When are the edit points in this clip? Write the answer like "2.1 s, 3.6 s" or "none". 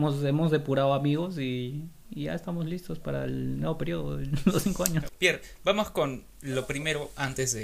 5.1 s